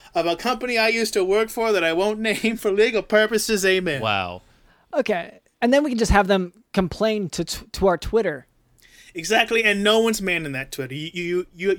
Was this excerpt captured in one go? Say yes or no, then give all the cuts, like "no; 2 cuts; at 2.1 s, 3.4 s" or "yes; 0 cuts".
yes; 0 cuts